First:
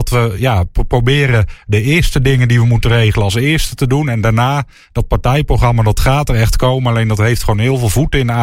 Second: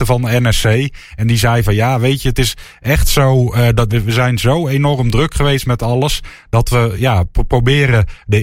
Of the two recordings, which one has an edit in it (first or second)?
second